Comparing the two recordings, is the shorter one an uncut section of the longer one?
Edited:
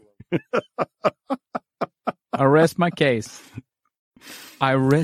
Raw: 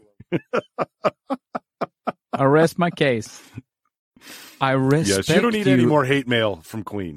yes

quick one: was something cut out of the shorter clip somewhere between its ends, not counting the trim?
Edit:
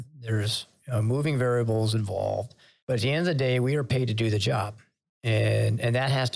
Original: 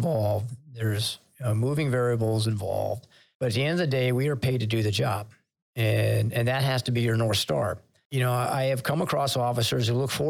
no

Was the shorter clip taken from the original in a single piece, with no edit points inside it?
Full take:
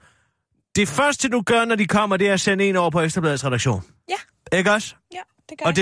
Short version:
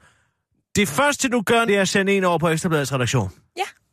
no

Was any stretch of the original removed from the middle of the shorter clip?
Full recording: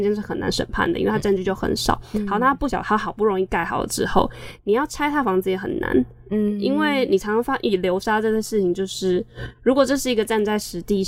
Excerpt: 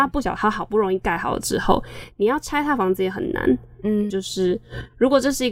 yes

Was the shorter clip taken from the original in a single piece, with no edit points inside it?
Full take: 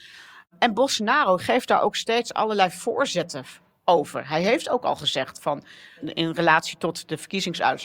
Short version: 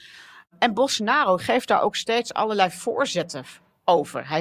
yes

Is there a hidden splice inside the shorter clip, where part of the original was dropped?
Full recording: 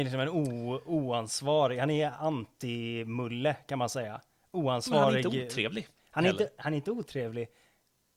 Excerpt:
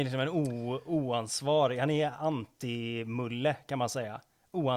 no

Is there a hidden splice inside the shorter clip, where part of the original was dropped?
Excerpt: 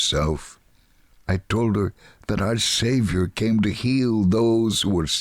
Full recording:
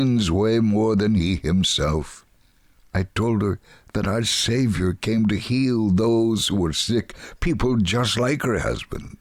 no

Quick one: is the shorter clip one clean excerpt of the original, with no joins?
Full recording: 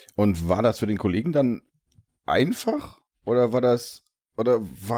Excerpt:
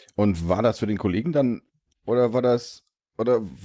no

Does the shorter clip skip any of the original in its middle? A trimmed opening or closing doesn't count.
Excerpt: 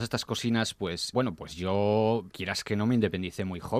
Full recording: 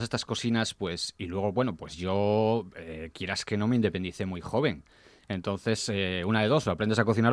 yes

